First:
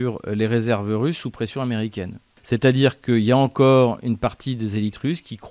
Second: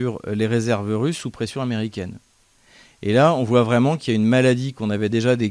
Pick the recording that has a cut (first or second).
first